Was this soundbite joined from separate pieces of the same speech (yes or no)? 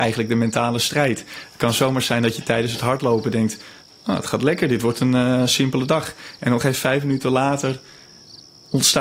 no